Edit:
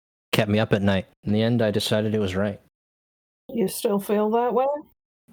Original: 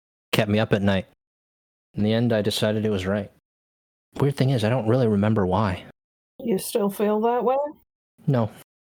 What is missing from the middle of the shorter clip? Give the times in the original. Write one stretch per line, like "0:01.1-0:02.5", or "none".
0:01.1-0:01.8
0:04.0-0:06.2

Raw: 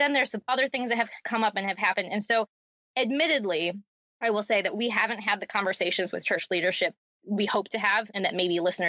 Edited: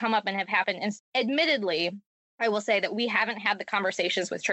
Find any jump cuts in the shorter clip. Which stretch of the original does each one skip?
0:02.3-0:02.8

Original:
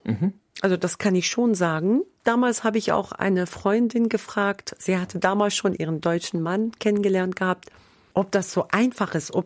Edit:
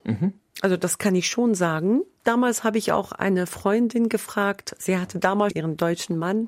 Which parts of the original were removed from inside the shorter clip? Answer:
0:05.5-0:05.7

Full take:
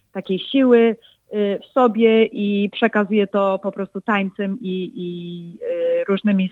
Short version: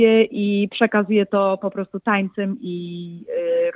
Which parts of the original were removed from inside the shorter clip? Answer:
0:04.6-0:04.9

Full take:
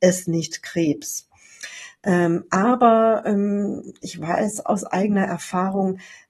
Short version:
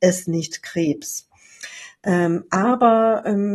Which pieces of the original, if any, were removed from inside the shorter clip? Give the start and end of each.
none

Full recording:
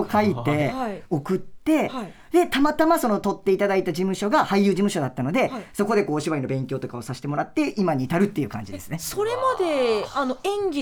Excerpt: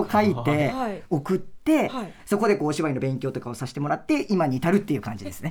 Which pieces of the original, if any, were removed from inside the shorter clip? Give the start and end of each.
0:02.2-0:05.7

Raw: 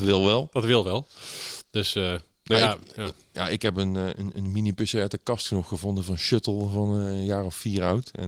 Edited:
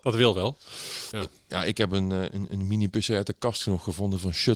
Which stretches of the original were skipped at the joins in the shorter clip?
0:01.6-0:03.0

